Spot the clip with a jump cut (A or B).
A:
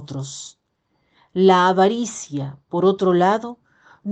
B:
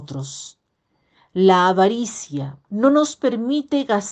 B